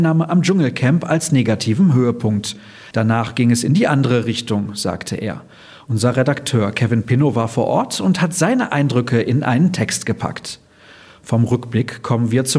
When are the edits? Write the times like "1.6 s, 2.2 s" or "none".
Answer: 2.9 s